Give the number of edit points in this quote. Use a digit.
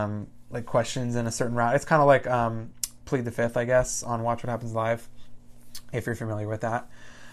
1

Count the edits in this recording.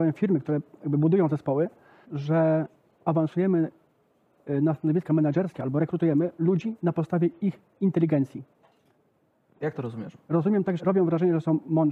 2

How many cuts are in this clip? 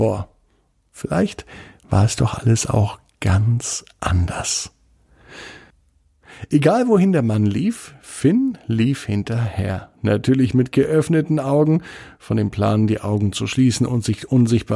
0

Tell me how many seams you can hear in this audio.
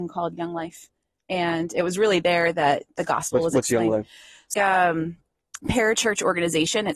1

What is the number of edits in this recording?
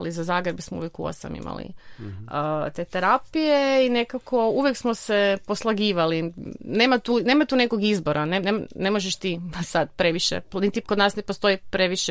1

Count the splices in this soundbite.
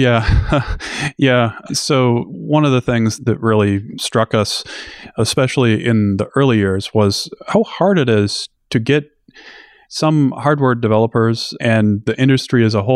0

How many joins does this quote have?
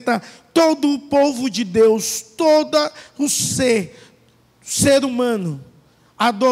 0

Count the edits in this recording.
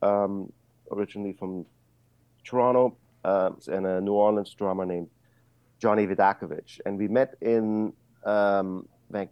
1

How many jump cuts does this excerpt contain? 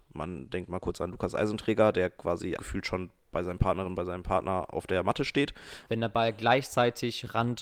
2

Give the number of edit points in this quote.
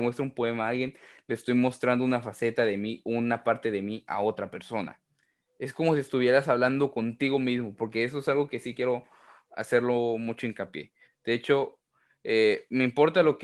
2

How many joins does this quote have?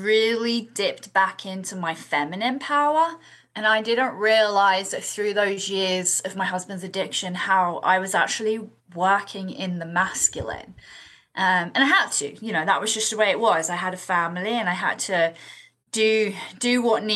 0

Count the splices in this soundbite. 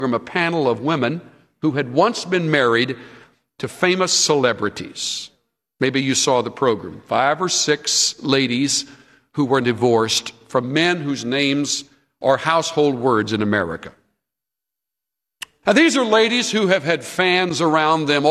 2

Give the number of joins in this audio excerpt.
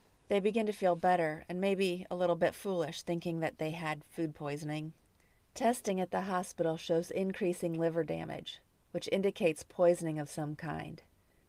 1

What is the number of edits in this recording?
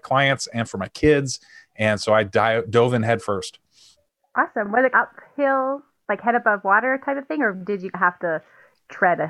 0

